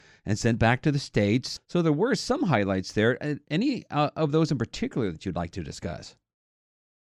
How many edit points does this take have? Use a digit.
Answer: 1